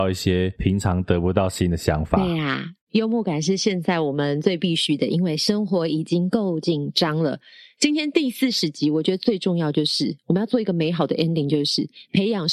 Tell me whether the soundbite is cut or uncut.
uncut